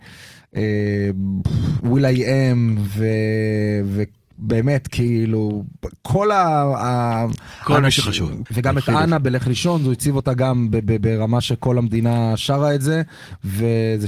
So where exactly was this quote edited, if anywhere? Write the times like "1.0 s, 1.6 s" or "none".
8.5 s